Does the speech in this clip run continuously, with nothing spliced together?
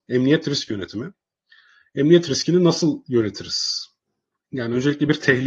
yes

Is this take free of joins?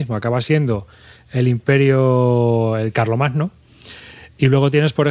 yes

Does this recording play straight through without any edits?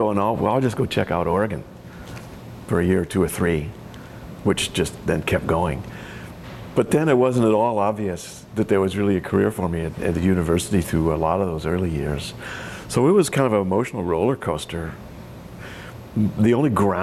yes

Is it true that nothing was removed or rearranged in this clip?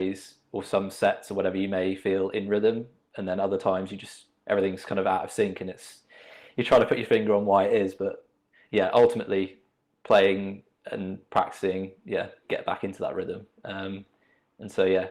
no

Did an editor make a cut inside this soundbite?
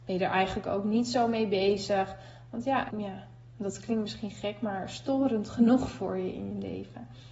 yes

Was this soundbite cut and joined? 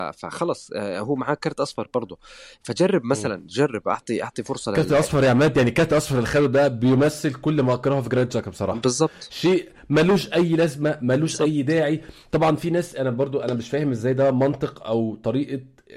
no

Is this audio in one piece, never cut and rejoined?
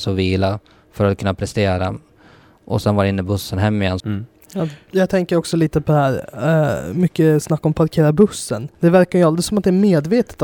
no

